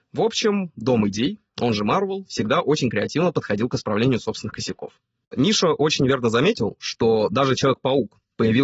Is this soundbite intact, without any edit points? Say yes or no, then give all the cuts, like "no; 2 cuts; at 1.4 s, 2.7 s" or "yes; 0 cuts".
yes; 0 cuts